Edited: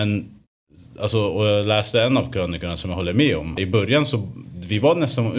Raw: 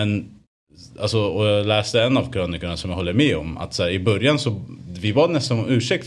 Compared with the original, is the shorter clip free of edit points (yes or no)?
no